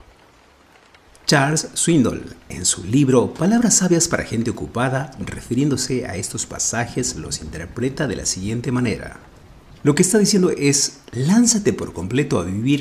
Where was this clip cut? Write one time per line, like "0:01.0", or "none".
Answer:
none